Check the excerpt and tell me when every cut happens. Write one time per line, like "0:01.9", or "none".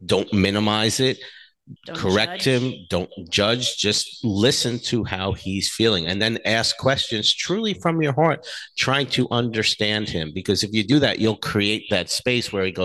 0:01.8